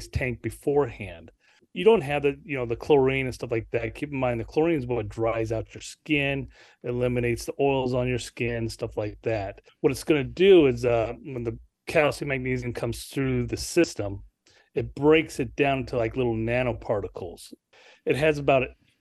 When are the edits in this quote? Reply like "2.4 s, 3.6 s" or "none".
9.7 s